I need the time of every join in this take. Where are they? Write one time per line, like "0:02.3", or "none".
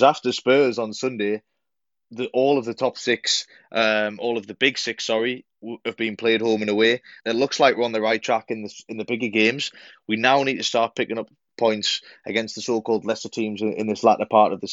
0:07.2